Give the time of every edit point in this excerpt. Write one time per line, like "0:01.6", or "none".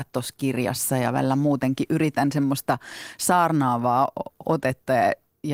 none

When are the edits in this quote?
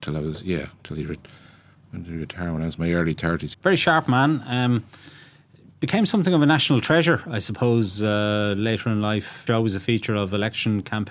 0:03.5
0:09.5

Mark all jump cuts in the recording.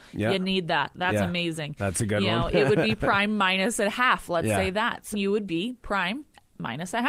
0:05.1

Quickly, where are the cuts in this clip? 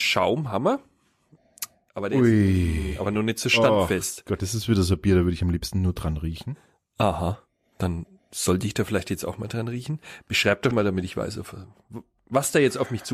0:10.7

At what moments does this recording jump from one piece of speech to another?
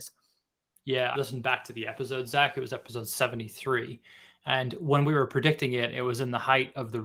0:01.1

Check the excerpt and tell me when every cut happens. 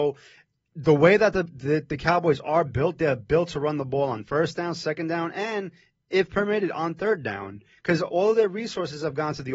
none

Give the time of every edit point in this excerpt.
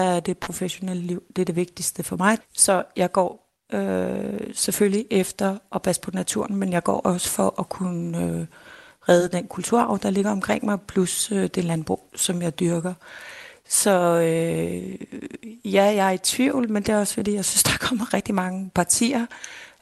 0:02.4

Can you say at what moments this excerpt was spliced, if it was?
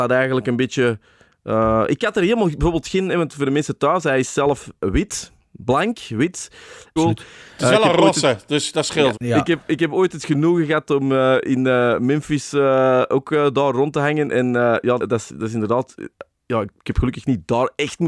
0:07.0
0:09.1
0:15.0

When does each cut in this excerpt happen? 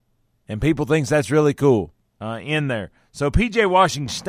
0:02.2

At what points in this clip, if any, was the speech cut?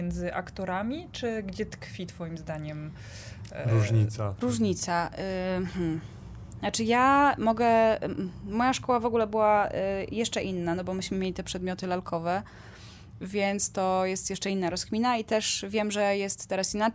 none

